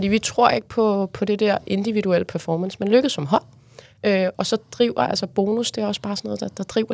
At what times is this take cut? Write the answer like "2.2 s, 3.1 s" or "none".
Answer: 4.3 s